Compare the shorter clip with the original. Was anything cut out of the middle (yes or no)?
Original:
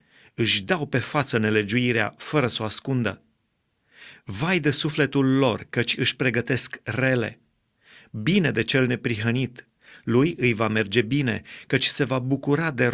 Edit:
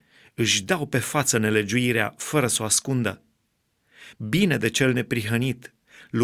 yes